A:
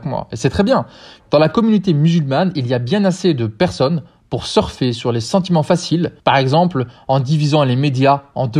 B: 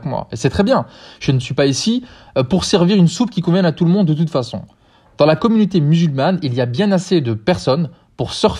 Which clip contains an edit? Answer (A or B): A